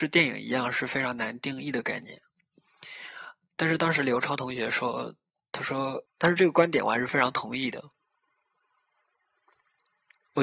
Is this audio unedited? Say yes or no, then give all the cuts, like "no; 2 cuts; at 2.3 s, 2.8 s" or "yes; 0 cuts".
no; 1 cut; at 6.1 s